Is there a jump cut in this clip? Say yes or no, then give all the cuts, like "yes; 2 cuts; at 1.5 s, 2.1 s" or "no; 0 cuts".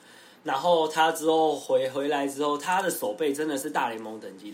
no; 0 cuts